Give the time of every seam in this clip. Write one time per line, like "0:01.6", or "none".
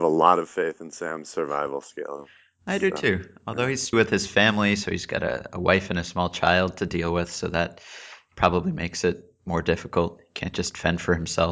0:03.9